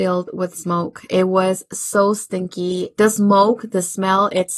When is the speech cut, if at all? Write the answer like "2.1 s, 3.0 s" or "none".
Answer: none